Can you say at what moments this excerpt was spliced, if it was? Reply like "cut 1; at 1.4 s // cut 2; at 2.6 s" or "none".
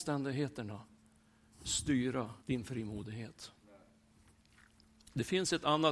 cut 1; at 2.4 s